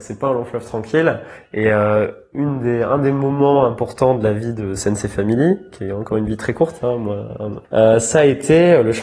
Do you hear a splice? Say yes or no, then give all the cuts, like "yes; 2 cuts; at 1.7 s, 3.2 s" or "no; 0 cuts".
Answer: yes; 1 cut; at 7.6 s